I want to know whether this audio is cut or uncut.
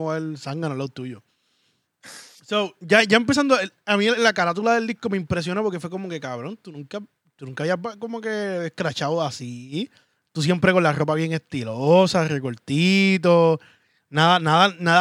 uncut